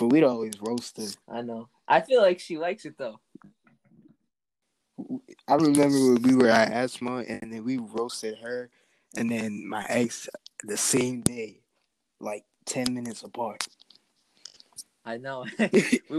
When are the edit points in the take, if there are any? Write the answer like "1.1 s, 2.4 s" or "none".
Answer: 1.2 s